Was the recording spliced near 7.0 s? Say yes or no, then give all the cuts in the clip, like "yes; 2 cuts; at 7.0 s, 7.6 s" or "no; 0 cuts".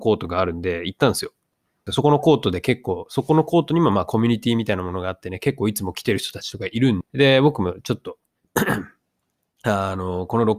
yes; 2 cuts; at 1.9 s, 7.0 s